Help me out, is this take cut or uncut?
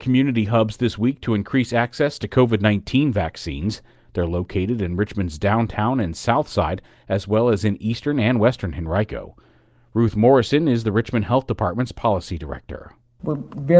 uncut